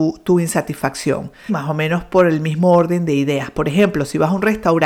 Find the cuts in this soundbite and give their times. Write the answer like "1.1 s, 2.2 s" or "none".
1.5 s